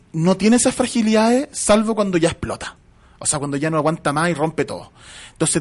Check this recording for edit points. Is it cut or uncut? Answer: uncut